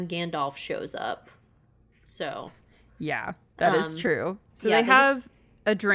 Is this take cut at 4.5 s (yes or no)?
yes